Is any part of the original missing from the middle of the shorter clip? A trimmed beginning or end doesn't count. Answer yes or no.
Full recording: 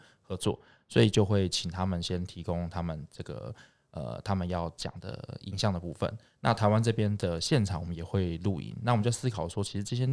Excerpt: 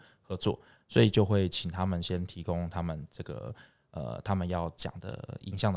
no